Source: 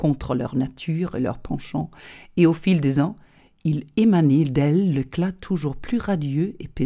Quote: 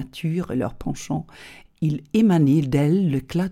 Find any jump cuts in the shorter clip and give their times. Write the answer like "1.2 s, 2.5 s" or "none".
1.7 s